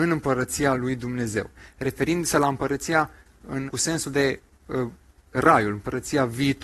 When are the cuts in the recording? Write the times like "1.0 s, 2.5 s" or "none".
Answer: 3.7 s